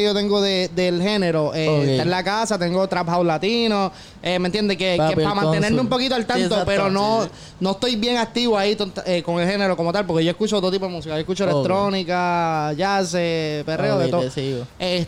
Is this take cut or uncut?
uncut